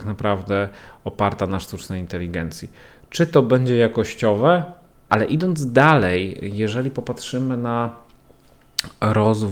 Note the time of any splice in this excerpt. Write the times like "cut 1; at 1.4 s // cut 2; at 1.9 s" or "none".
cut 1; at 5.1 s

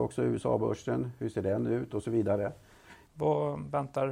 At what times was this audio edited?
cut 1; at 1.9 s // cut 2; at 3.1 s

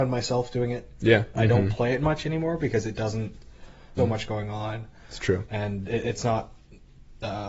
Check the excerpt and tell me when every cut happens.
cut 1; at 1.3 s // cut 2; at 4.0 s

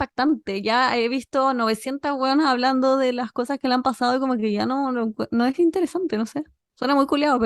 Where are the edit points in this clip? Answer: none

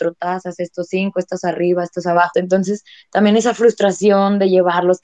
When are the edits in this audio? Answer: cut 1; at 2.3 s

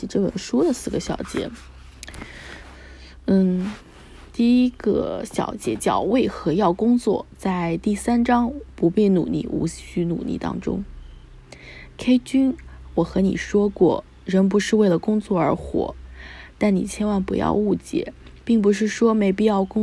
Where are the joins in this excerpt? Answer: none

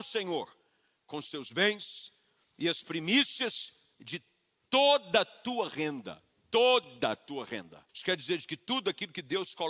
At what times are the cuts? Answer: cut 1; at 7.9 s

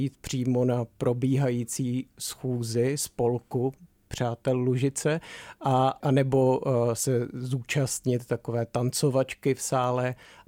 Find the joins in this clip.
none

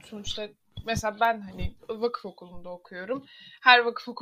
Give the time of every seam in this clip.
none

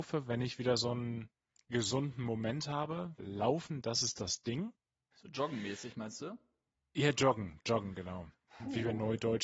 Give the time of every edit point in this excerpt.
cut 1; at 3.2 s

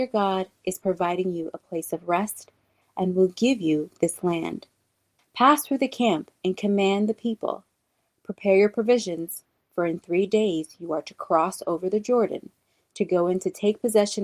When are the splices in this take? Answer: cut 1; at 5.2 s

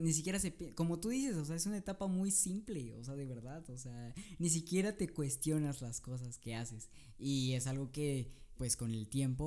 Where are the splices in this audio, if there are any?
cut 1; at 8.6 s

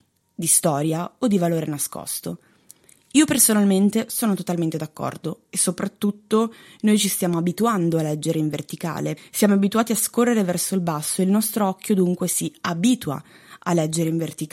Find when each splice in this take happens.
cut 1; at 9.2 s

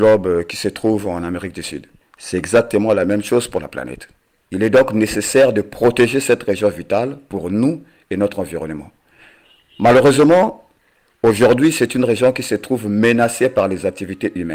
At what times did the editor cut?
cut 1; at 2.0 s // cut 2; at 4.4 s

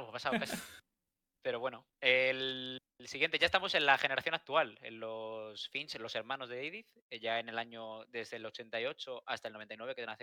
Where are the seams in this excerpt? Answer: none

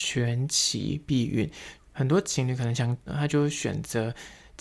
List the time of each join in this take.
cut 1; at 1.8 s // cut 2; at 3.1 s

